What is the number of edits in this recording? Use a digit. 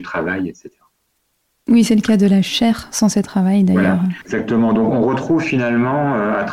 1